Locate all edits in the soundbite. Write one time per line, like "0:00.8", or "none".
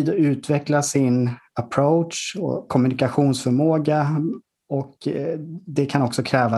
0:02.7